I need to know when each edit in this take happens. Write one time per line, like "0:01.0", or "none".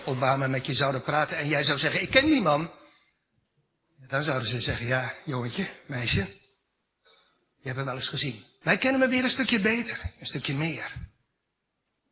0:08.6